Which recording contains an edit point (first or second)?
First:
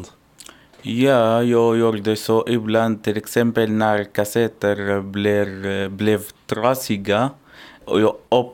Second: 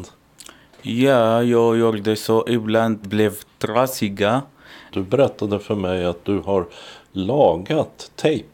second